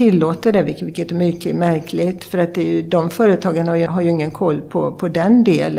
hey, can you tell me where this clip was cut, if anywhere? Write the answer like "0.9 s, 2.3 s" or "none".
3.9 s

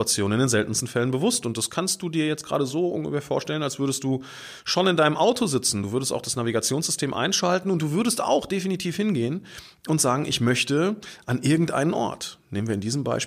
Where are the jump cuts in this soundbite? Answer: none

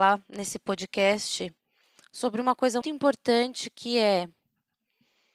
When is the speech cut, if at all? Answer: 2.8 s

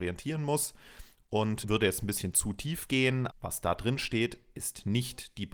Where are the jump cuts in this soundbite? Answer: 1.6 s, 3.3 s

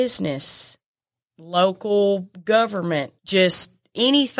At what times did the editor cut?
3.2 s

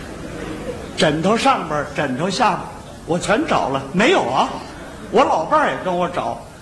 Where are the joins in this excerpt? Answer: none

